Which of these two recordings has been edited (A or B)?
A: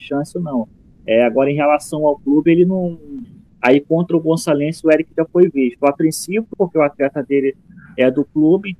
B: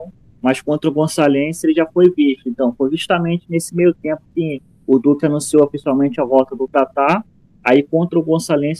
A